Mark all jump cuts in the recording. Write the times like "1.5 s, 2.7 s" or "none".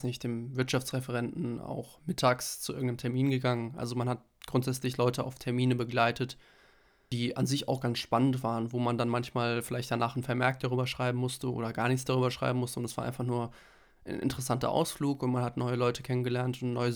none